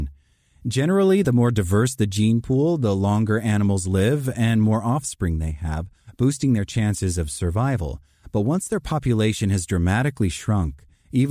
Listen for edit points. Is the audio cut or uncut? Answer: uncut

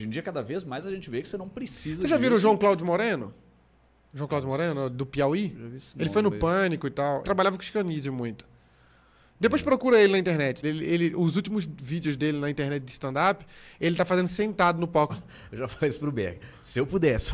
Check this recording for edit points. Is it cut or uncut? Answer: cut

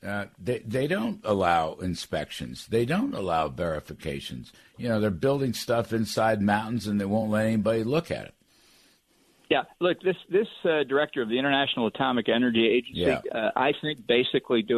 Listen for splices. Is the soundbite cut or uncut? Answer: cut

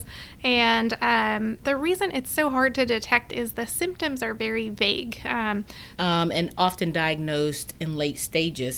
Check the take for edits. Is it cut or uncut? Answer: cut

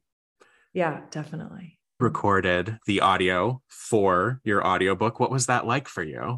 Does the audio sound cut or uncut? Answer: cut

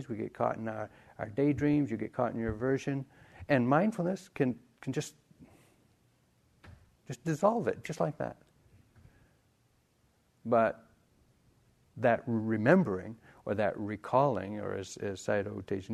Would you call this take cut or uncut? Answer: uncut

